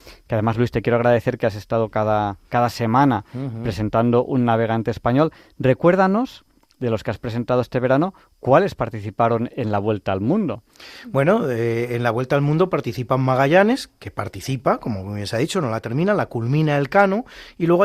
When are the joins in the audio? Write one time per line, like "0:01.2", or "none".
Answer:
none